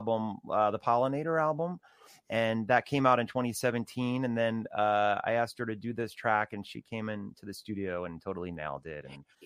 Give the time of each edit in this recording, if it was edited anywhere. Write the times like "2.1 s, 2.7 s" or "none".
none